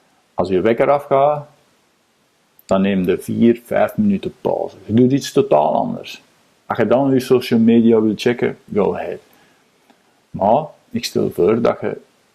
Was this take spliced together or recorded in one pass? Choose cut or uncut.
uncut